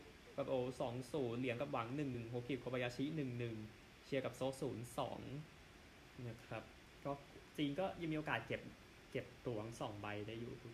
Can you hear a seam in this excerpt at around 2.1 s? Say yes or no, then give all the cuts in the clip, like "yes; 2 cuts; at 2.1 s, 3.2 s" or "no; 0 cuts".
yes; 1 cut; at 2.1 s